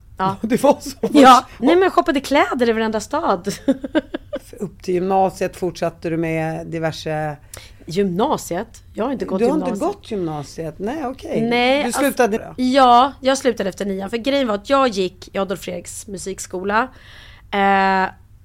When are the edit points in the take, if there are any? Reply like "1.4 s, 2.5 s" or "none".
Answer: 1.6 s, 12.4 s

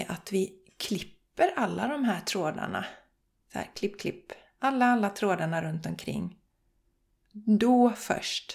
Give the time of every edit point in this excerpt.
3.7 s

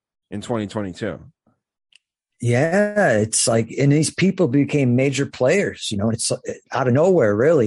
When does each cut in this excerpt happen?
none

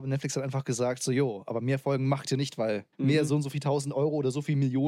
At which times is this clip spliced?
2.9 s

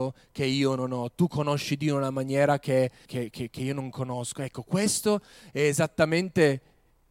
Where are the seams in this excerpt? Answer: 3.1 s

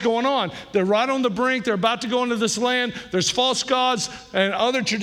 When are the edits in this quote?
none

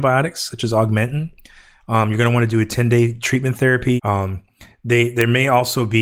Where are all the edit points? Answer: 4.0 s

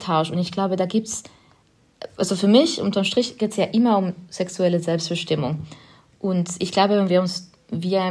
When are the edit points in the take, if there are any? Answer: none

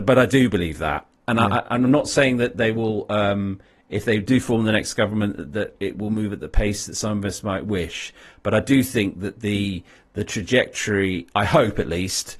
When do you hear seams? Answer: none

